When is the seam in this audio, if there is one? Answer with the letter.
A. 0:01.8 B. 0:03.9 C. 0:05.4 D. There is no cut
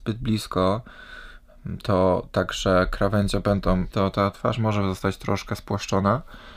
B